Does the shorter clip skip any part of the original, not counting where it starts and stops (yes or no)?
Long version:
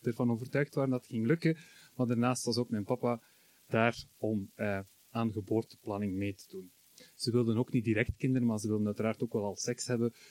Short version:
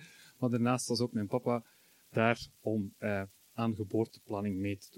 no